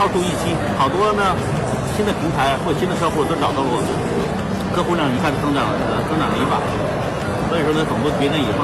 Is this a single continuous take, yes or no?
yes